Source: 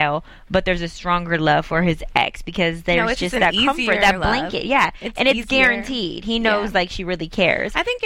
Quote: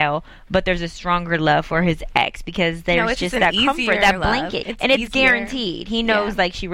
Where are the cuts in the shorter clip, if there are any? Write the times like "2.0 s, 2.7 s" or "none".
4.6 s